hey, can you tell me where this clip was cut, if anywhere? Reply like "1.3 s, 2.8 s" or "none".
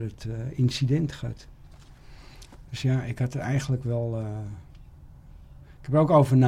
none